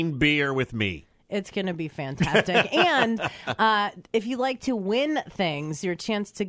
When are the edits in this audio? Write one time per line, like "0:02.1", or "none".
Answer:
none